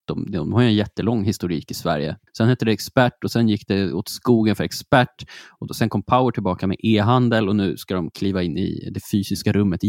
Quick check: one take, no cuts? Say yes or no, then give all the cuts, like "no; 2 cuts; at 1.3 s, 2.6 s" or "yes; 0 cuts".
no; 1 cut; at 2.3 s